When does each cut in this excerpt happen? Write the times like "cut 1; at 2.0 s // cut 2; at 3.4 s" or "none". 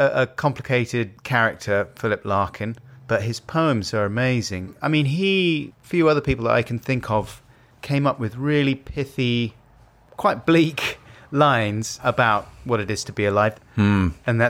cut 1; at 5.7 s // cut 2; at 13.5 s